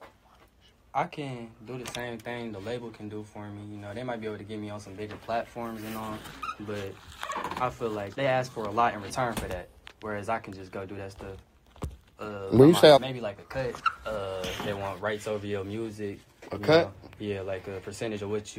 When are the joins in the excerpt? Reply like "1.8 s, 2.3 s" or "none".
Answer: 8.1 s, 13.0 s